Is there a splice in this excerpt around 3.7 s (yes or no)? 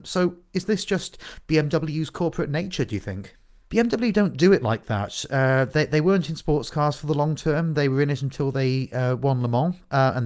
yes